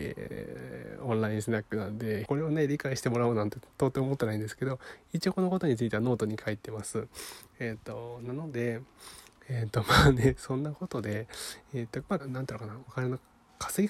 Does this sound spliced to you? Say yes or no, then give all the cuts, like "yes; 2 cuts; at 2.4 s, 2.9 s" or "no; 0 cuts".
yes; 2 cuts; at 2.3 s, 12.2 s